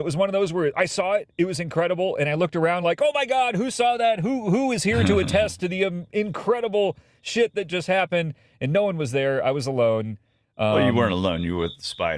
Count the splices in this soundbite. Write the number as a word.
zero